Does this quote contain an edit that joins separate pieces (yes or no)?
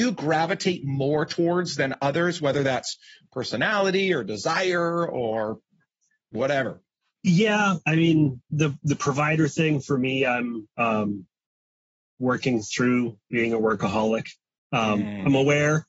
no